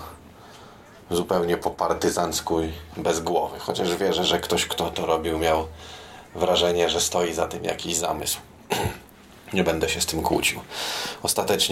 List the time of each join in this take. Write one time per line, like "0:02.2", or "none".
none